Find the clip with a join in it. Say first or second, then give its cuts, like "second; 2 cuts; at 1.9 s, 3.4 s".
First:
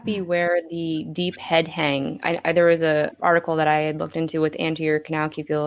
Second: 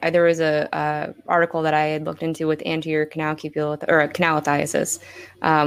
first; 1 cut; at 3.1 s